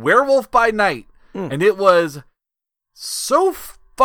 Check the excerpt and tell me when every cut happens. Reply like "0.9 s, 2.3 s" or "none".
none